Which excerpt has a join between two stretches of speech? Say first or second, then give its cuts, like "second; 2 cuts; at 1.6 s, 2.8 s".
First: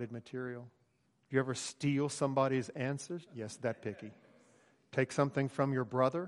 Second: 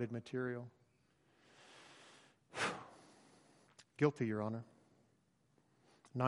first; 2 cuts; at 1.1 s, 3.3 s